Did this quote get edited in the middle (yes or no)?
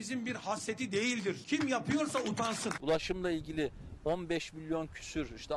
yes